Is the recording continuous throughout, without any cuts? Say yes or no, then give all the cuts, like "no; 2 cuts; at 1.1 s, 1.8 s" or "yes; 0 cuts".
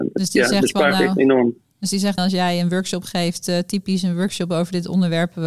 no; 1 cut; at 2.2 s